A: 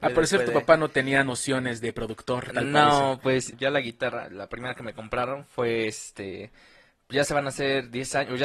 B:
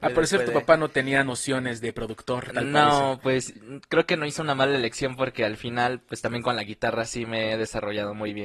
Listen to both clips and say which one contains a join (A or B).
A